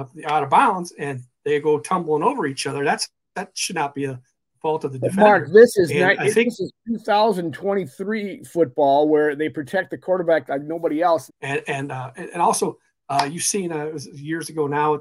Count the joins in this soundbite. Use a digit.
1